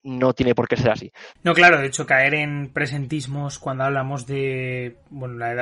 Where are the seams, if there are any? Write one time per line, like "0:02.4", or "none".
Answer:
0:01.4